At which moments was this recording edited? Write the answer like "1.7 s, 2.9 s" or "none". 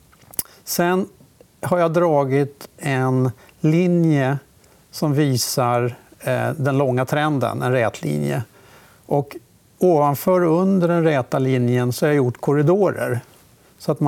none